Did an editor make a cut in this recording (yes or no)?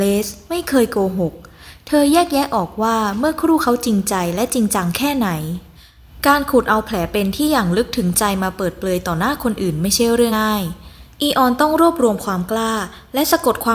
yes